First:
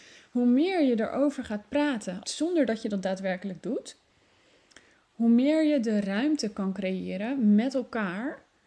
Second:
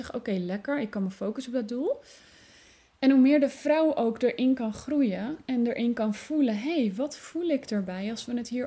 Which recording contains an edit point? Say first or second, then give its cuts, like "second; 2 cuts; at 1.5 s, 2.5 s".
first; 1 cut; at 2.2 s